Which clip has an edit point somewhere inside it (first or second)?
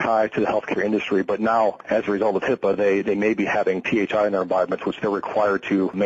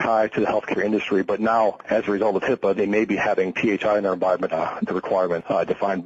second